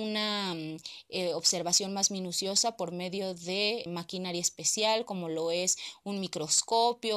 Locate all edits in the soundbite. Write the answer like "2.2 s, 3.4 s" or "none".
3.9 s